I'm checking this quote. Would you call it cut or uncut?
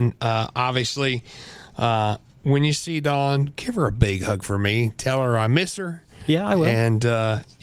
uncut